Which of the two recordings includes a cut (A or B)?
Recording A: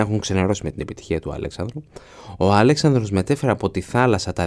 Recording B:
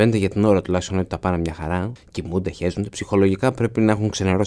B